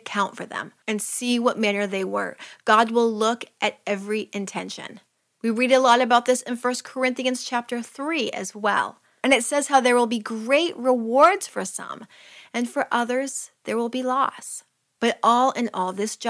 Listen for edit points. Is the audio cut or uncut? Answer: uncut